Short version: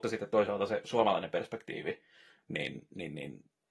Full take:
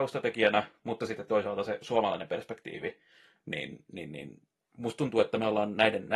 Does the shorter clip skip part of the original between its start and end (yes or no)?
no